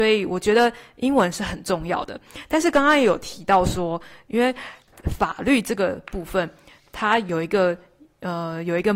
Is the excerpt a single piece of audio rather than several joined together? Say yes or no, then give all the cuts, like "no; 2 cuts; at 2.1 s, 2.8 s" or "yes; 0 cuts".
yes; 0 cuts